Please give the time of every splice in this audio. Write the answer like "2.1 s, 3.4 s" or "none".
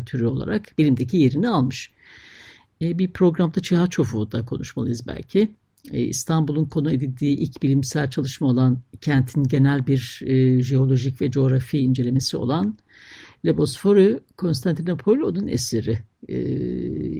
none